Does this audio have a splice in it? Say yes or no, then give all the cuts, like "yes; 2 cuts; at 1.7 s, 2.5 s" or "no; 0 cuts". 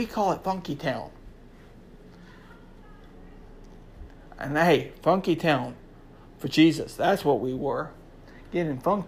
no; 0 cuts